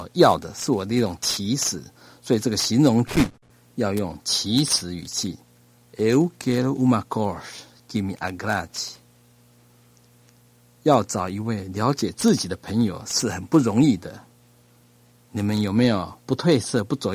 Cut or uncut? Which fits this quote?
cut